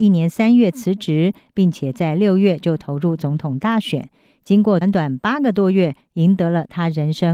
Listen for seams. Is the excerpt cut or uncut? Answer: cut